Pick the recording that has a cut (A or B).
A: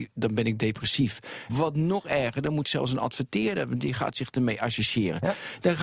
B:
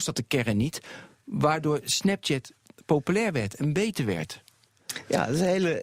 A